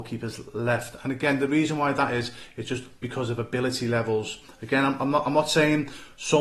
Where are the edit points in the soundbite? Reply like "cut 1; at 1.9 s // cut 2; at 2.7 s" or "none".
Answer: none